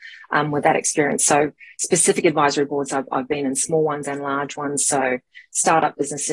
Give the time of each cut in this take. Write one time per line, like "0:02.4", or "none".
none